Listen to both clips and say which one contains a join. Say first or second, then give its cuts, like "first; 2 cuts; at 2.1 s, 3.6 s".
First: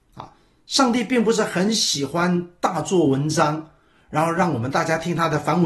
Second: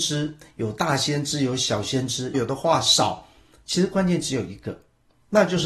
second; 1 cut; at 2.3 s